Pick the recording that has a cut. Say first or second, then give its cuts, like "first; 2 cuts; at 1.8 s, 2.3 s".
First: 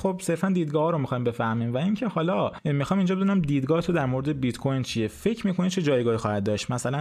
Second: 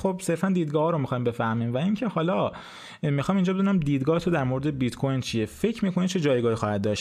first; 1 cut; at 2.6 s